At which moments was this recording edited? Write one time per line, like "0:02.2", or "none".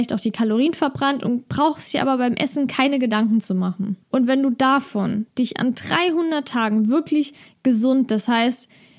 0:04.0